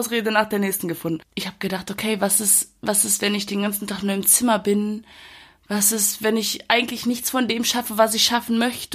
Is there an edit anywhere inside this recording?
no; 0 cuts

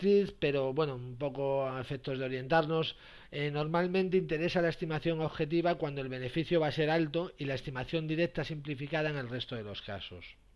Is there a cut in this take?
no; 0 cuts

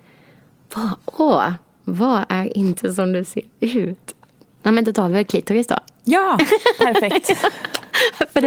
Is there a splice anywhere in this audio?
no; 0 cuts

